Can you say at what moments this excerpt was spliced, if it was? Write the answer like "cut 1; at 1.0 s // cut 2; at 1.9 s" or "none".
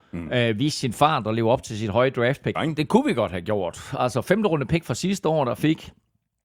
cut 1; at 2.5 s